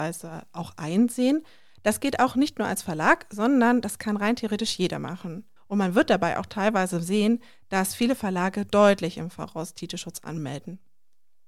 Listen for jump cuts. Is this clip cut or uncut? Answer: cut